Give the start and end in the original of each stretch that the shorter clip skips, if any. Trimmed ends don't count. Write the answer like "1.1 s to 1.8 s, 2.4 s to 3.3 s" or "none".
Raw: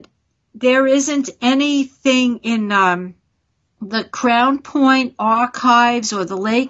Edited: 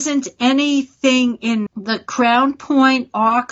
2.7 s to 3.7 s

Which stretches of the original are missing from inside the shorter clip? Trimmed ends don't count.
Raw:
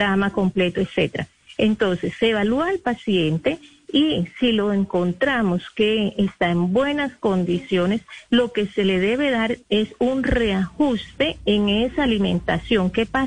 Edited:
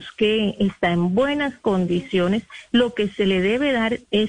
none

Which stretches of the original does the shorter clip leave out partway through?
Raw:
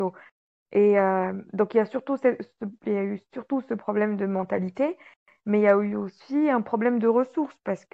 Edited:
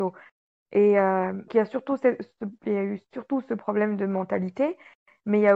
1.5 s to 1.7 s

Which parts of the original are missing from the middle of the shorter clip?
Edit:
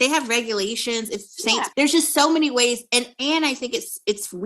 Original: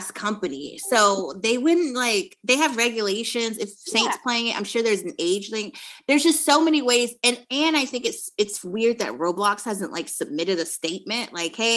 4.2 s to 6.0 s

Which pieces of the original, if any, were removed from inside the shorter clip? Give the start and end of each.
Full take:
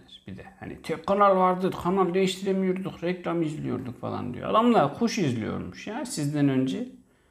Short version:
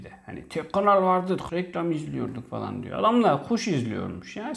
1.8 s to 3.0 s

